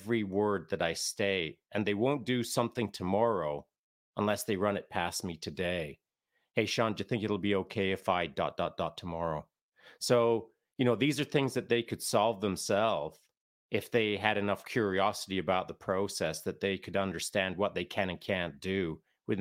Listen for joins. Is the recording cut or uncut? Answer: uncut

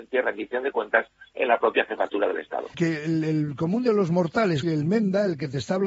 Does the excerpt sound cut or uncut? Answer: cut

